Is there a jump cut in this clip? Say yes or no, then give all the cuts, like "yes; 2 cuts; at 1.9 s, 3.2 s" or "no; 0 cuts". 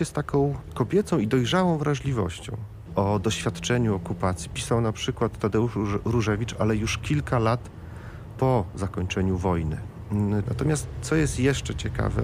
yes; 2 cuts; at 2.9 s, 10.5 s